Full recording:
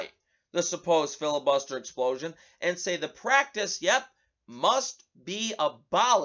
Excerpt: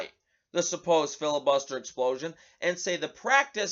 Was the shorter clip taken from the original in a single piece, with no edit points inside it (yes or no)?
yes